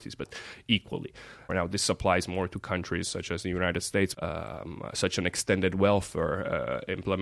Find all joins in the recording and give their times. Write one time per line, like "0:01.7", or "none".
0:01.5
0:04.1